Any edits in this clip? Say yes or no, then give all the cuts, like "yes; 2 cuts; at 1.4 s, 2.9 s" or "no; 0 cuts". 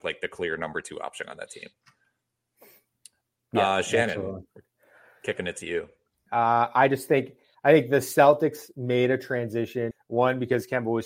yes; 2 cuts; at 6.3 s, 9.9 s